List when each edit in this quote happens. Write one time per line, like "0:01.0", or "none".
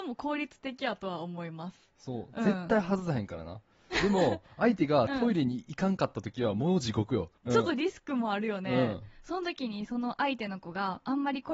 0:07.5